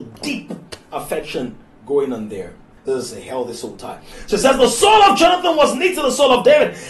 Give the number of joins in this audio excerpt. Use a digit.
1